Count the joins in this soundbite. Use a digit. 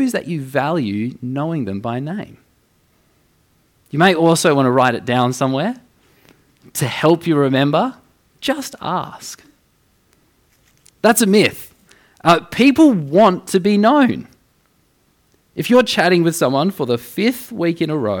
2